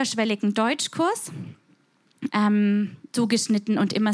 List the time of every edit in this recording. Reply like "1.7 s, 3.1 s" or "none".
2.3 s